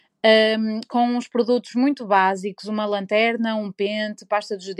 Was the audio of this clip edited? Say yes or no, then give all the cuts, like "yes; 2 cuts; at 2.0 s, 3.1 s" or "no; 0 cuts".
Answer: no; 0 cuts